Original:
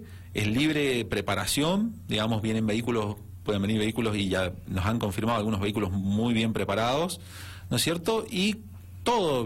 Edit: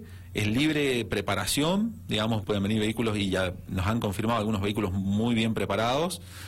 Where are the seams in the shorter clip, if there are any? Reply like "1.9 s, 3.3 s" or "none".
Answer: 2.4 s